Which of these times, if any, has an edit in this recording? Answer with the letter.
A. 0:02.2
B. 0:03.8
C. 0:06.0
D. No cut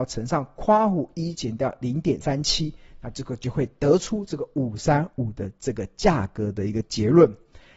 A